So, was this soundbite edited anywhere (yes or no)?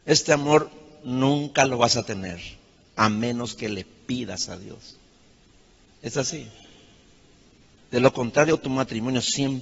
no